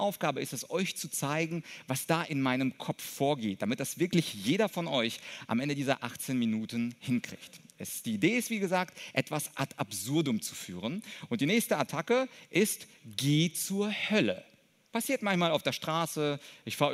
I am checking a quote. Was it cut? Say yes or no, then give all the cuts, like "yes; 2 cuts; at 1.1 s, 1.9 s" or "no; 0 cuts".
no; 0 cuts